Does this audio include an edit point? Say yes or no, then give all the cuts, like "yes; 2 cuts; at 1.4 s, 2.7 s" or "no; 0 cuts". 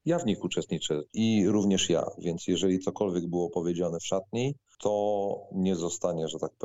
yes; 1 cut; at 1.1 s